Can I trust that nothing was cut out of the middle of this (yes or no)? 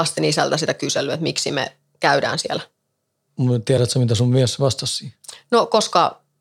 no